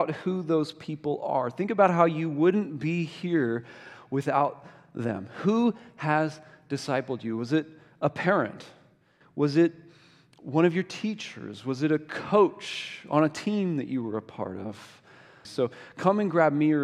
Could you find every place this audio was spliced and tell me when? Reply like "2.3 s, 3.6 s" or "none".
15.4 s